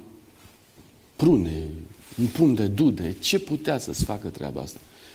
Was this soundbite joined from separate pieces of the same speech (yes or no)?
no